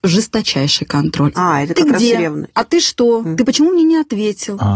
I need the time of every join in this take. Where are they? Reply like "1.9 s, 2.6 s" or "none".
none